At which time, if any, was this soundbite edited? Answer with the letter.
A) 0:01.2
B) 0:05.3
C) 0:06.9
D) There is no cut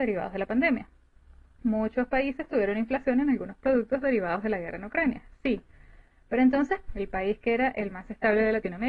C